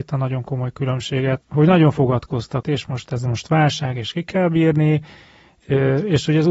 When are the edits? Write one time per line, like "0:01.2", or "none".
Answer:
0:02.6